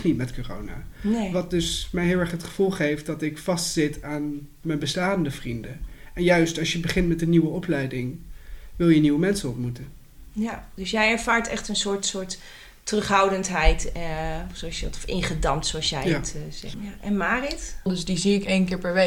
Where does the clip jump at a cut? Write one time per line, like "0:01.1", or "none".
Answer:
0:16.7
0:17.9